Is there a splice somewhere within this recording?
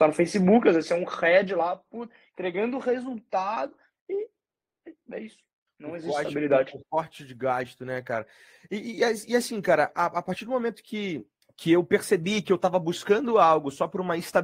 no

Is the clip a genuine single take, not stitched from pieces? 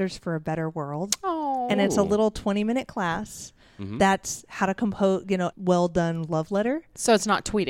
no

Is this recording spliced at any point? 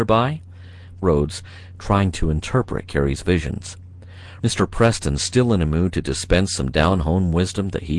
yes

